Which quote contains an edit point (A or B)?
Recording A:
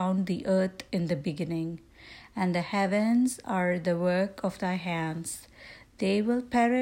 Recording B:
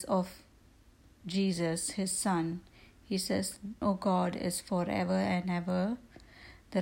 B